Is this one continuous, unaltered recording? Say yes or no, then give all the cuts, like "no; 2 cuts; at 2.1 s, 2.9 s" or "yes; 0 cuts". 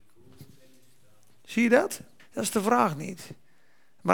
no; 1 cut; at 2.2 s